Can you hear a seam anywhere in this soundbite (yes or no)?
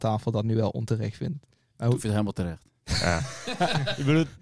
no